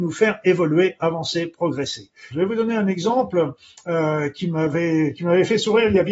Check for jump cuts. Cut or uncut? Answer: cut